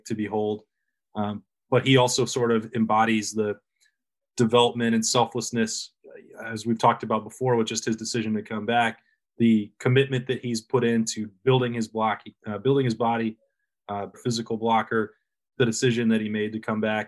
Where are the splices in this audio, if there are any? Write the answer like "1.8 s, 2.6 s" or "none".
9.2 s, 14.1 s, 15.5 s